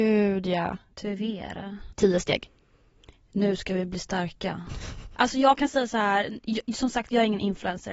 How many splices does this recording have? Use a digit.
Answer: 2